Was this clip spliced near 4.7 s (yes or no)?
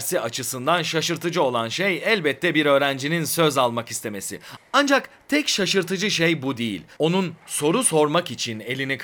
no